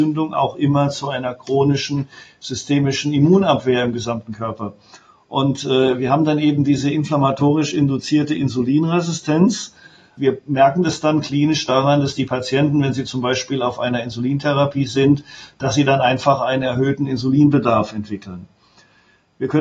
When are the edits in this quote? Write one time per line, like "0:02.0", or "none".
none